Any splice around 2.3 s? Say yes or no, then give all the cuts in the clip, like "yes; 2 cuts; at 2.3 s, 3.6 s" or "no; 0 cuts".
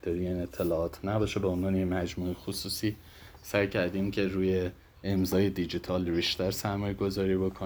no; 1 cut; at 6.1 s